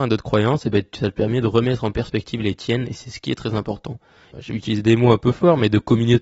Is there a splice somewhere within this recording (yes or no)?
yes